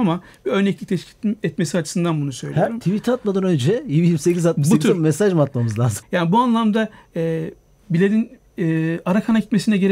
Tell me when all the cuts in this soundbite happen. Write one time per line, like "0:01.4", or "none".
0:06.0